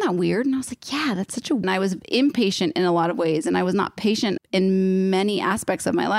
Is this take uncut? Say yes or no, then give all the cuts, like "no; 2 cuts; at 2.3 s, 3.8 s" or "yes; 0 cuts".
no; 2 cuts; at 1.6 s, 4.4 s